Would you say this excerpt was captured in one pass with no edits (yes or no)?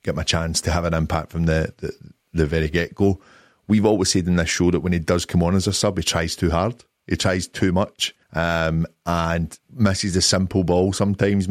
no